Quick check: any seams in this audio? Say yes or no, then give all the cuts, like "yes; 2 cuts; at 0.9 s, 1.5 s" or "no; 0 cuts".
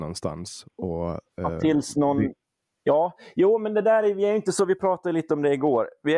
no; 0 cuts